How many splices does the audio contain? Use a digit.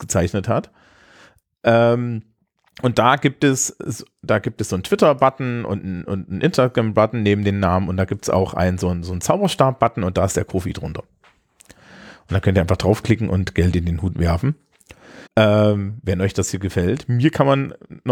1